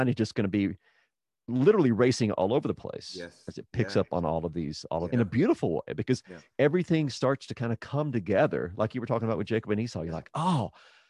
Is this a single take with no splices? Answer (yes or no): no